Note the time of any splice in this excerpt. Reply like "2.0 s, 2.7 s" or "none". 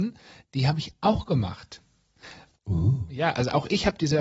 2.5 s